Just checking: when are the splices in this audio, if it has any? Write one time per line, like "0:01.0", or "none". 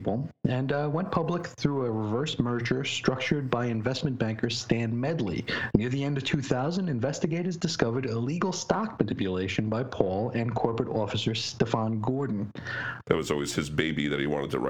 0:05.7
0:13.0